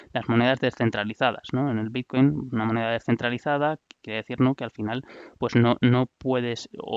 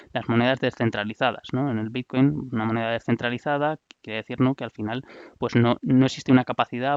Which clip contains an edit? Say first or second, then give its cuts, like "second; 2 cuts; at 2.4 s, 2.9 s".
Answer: second; 1 cut; at 5.8 s